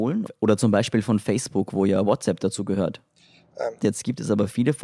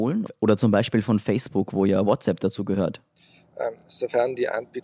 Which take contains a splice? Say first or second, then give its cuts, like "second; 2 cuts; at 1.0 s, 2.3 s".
first; 1 cut; at 3.8 s